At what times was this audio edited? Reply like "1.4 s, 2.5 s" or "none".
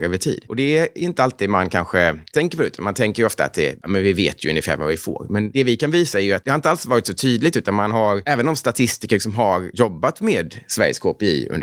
none